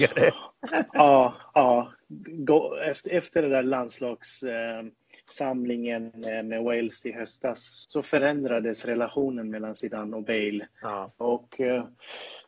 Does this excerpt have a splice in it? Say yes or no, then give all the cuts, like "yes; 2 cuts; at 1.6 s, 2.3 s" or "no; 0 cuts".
yes; 3 cuts; at 3.0 s, 7.8 s, 11.2 s